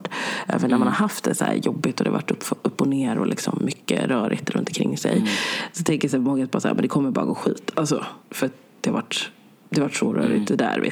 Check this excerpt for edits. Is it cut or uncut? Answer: cut